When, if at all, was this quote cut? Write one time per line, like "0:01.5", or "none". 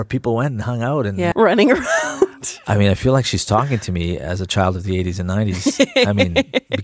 0:01.3